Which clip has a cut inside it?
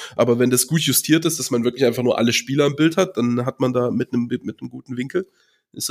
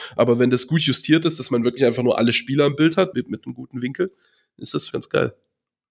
second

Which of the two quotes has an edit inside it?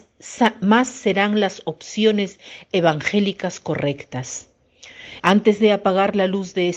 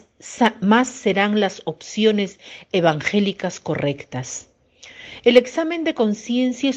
first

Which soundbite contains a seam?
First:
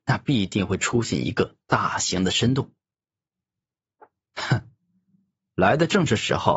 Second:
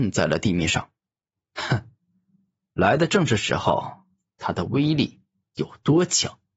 second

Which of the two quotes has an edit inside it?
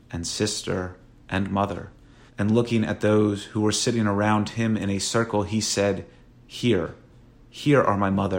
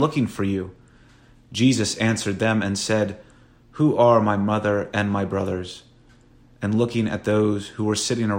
first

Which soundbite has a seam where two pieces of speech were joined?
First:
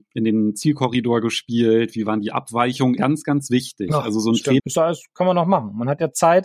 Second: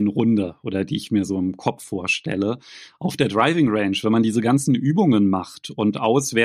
first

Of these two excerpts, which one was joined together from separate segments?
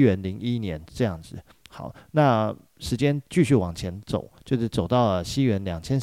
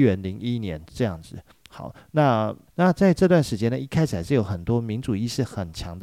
second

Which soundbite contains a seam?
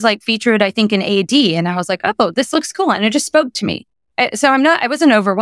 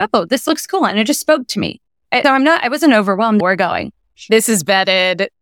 second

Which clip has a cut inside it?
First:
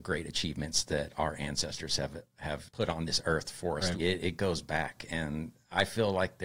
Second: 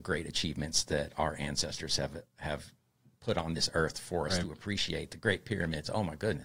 first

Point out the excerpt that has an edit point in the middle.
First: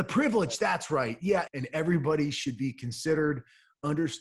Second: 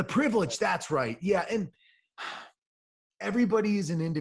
first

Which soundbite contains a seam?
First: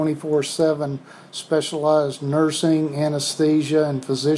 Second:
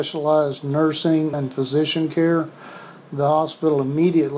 second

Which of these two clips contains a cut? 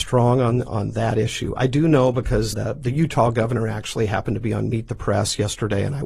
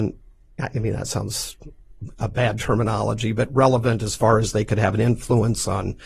first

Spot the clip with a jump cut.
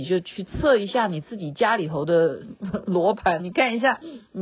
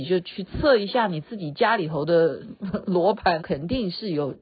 second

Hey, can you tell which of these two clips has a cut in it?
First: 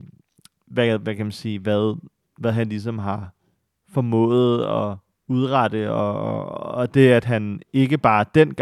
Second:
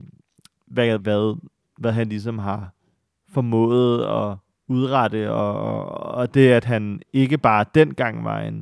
second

